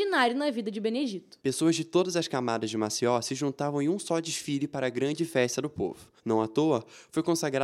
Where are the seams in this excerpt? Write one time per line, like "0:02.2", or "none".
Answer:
0:01.4